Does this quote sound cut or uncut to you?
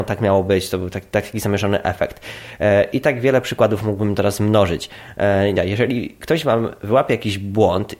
cut